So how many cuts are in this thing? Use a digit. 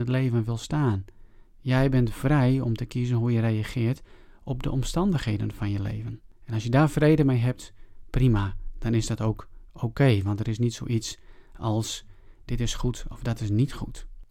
1